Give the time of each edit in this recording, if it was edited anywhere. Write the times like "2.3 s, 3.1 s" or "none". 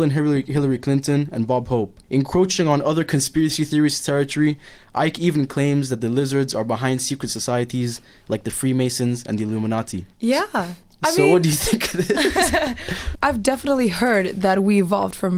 2.0 s, 10.1 s, 13.1 s